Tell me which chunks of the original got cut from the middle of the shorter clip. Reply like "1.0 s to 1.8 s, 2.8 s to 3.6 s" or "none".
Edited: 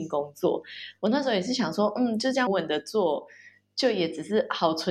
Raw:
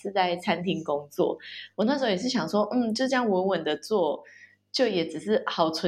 3.2 s to 3.4 s

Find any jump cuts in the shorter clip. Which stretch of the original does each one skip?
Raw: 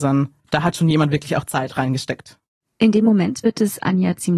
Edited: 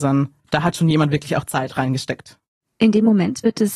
none

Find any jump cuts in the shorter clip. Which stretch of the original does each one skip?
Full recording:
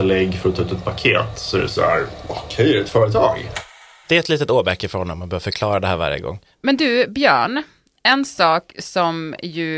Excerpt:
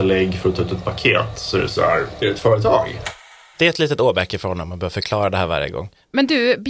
2.2 s to 2.7 s

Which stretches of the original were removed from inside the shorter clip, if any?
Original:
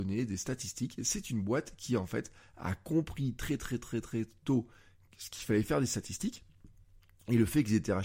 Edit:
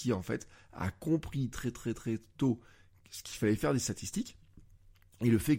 3.4 s to 3.6 s

